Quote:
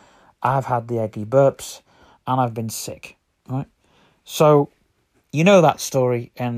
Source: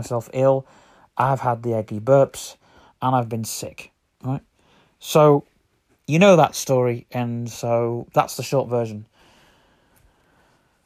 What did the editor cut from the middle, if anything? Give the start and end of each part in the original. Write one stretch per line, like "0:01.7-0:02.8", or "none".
none